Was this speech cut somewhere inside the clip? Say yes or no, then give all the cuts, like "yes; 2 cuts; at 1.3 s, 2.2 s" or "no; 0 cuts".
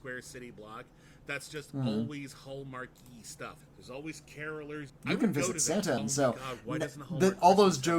yes; 3 cuts; at 3.6 s, 4.9 s, 6.0 s